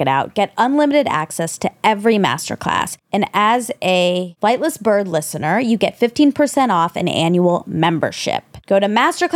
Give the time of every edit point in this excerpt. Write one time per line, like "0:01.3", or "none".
none